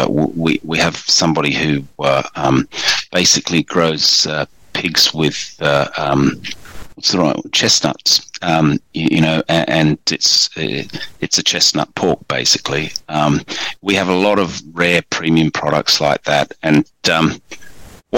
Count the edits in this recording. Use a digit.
0